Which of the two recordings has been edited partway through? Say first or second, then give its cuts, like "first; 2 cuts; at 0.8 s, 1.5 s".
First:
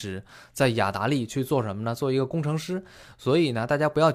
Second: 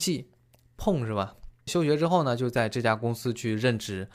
second; 1 cut; at 1.7 s